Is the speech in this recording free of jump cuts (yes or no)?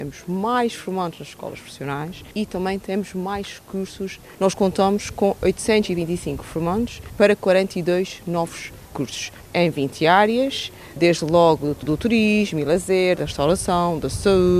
no